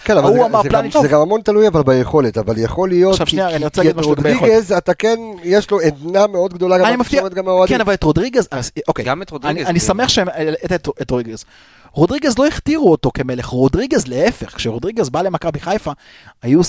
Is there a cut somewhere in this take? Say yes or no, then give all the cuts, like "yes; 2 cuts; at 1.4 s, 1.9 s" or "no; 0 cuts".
yes; 1 cut; at 0.9 s